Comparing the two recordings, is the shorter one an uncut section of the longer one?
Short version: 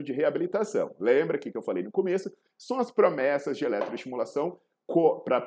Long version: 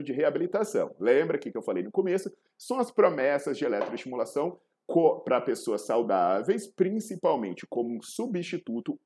yes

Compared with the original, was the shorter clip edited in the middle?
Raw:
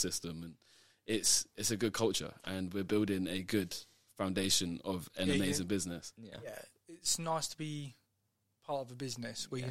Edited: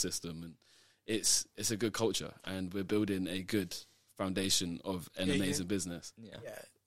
no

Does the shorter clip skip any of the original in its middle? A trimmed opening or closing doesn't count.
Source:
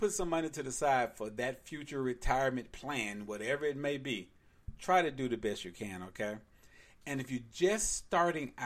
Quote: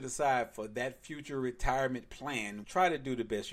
yes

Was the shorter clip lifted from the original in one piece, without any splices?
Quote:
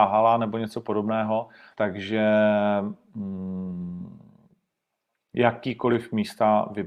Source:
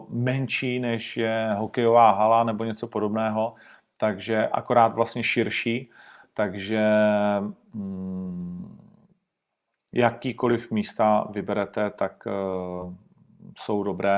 no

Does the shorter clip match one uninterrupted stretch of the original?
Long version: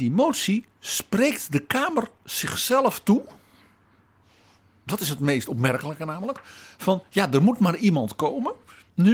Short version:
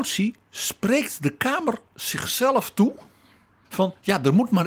no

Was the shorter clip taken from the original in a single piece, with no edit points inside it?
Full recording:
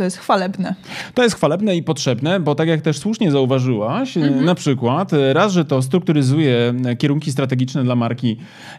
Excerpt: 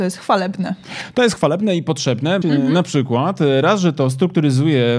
no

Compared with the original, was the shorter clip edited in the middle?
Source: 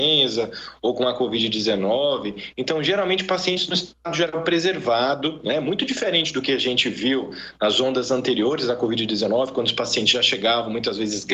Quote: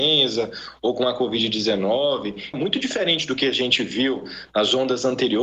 yes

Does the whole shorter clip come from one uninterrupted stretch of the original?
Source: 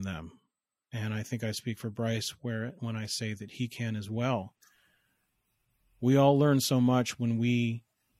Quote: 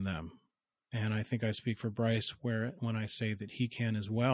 yes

